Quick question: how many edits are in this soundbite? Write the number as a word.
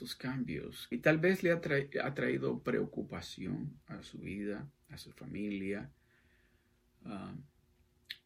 one